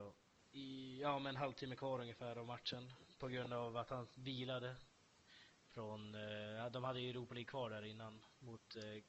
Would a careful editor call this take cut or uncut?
uncut